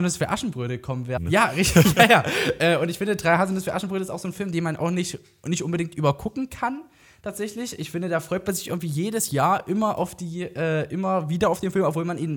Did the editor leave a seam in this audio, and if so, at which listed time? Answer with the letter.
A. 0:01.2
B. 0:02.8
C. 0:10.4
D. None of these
A